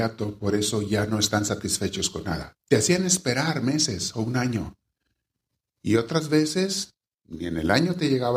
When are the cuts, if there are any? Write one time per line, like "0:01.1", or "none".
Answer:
0:02.6